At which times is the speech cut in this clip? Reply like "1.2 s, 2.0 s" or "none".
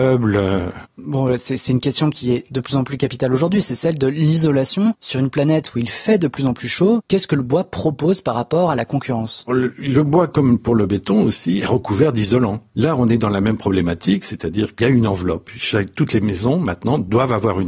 9.5 s